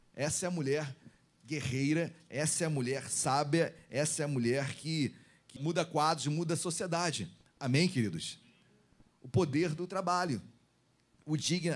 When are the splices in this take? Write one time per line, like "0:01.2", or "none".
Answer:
0:05.6